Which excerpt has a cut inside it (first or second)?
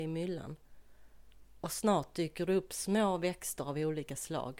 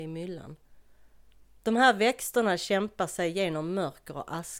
second